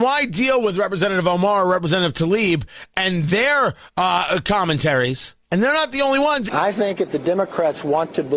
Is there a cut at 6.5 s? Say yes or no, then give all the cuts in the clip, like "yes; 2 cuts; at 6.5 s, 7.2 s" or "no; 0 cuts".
yes; 2 cuts; at 5.4 s, 6.5 s